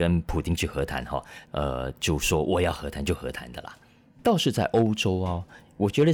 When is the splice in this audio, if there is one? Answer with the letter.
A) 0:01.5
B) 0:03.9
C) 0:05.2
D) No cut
A